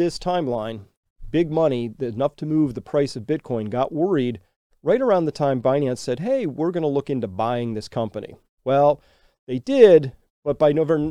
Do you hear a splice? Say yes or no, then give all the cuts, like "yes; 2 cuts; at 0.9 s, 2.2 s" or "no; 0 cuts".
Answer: no; 0 cuts